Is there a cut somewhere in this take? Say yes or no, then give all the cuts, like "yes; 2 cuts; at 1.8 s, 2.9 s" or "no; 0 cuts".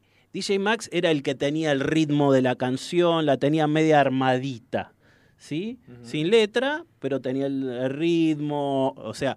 no; 0 cuts